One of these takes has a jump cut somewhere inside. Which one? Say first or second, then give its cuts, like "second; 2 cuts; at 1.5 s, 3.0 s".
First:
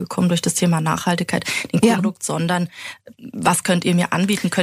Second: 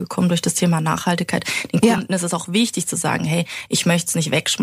first; 1 cut; at 2.0 s